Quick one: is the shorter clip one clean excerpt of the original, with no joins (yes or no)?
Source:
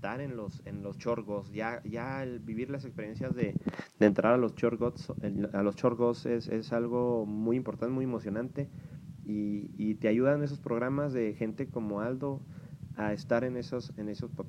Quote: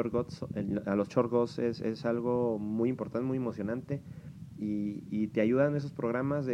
yes